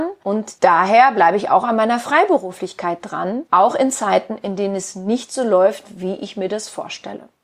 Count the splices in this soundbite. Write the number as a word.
zero